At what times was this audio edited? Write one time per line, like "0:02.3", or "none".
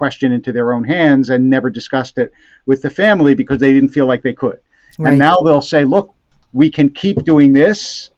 none